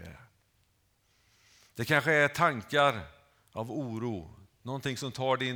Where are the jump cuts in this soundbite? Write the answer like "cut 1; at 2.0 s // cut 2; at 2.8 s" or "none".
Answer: none